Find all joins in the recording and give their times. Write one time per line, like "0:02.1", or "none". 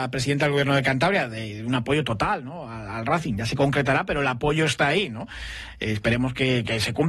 none